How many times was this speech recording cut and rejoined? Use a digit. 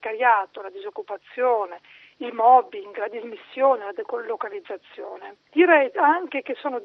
0